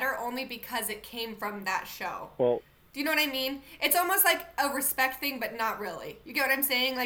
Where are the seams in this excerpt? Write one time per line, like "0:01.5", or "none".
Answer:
none